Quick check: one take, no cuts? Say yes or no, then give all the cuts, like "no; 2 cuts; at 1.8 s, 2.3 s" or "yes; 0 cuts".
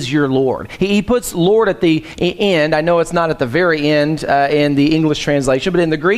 yes; 0 cuts